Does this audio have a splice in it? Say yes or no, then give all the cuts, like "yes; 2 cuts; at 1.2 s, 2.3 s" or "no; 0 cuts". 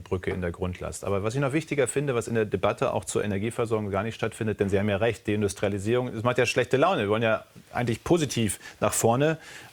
no; 0 cuts